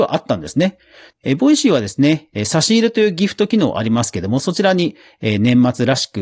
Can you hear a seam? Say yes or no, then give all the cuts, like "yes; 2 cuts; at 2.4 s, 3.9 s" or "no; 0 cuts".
yes; 1 cut; at 1.1 s